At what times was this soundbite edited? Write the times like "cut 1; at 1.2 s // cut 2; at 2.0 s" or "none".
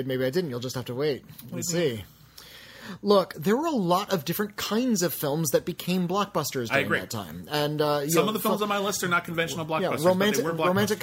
cut 1; at 3.3 s